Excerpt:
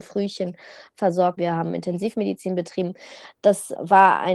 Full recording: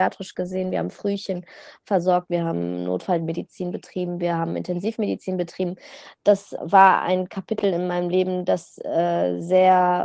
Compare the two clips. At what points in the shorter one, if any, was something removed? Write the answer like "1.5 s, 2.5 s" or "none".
1.4 s

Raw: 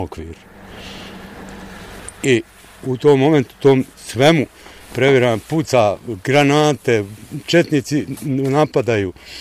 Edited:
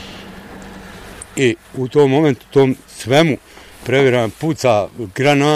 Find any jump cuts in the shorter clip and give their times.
1.6 s

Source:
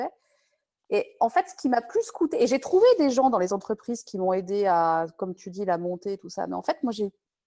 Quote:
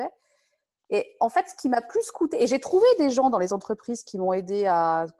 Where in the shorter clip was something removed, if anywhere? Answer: none

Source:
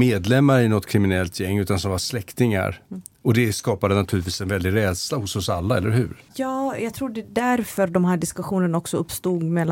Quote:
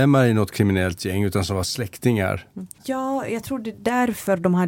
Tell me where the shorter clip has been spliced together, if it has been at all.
2.7 s

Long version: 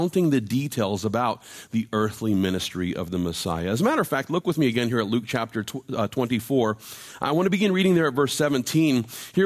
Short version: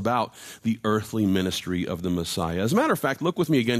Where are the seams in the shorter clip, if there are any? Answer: none

